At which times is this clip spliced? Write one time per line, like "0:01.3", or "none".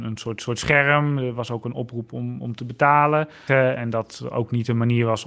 0:03.5